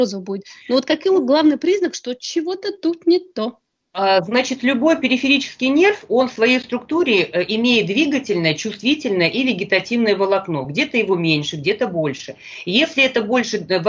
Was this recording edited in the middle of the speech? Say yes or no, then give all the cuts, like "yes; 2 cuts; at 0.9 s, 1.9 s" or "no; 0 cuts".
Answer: no; 0 cuts